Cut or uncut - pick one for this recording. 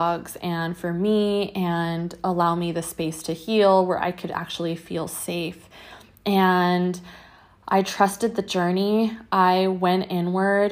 uncut